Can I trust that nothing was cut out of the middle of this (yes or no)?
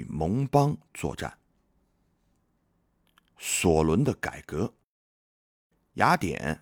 yes